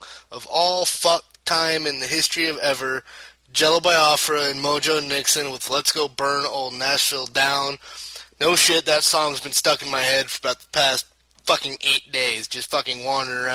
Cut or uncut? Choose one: uncut